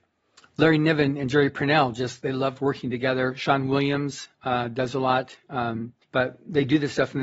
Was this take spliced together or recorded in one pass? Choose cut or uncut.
cut